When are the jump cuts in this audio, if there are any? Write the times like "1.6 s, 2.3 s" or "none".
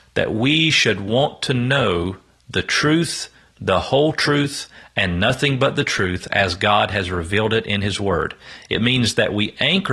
none